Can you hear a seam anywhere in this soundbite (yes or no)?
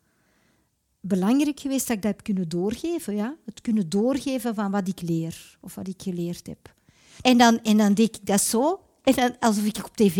yes